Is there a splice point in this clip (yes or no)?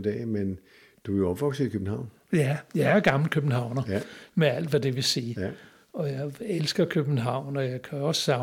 no